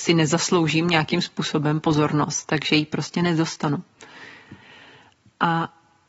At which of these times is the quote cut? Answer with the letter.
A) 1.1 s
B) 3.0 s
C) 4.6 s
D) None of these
D